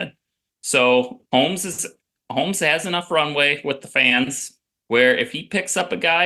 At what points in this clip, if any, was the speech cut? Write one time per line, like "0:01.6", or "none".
0:01.2
0:04.8